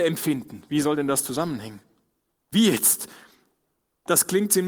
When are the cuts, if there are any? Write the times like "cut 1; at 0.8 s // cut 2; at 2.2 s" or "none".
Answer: cut 1; at 2.4 s

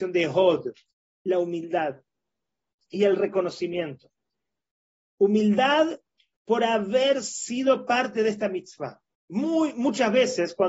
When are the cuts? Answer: cut 1; at 1.1 s

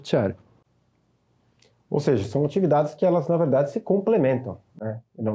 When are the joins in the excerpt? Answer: none

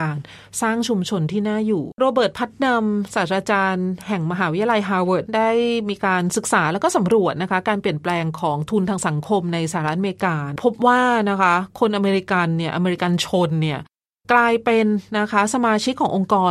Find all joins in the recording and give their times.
none

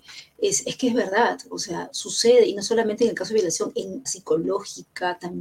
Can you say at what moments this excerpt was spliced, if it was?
cut 1; at 4.1 s

